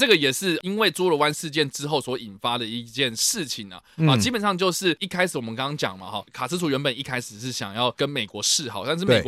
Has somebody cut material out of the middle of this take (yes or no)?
no